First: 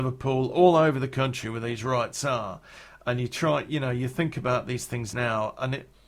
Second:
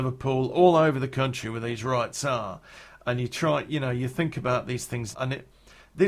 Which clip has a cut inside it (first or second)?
second